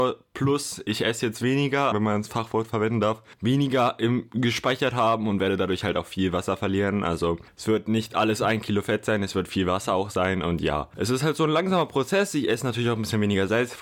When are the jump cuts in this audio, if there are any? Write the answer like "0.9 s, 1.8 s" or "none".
1.9 s